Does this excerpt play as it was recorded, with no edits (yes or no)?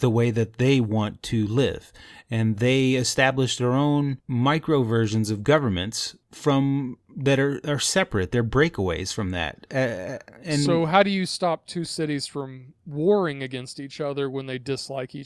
yes